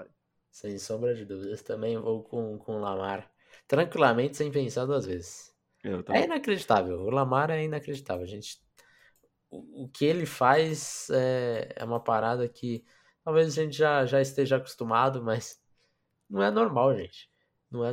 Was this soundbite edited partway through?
no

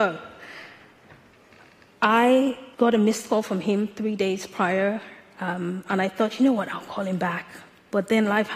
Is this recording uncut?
no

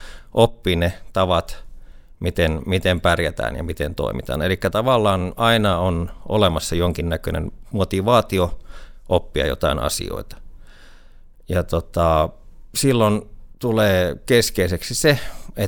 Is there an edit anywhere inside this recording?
no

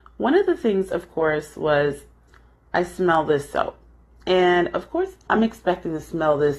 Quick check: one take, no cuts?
no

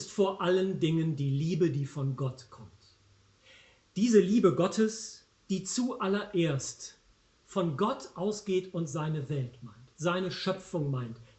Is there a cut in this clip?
no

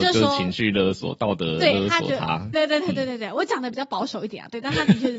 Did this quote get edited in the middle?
yes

